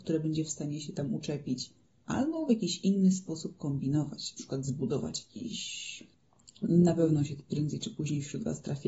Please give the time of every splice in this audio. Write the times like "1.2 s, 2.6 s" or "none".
none